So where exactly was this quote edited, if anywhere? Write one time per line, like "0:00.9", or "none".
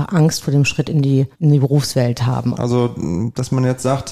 0:01.3
0:02.5